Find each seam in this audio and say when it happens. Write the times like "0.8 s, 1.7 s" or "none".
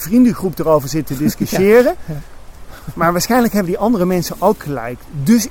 none